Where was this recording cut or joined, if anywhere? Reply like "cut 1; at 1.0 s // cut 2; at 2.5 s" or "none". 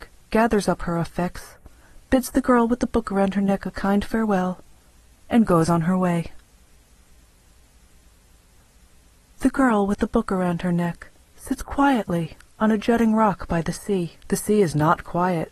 cut 1; at 14.2 s